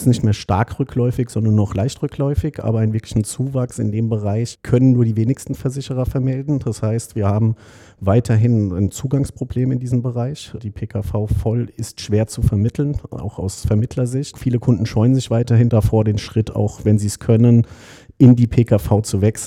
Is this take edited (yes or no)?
no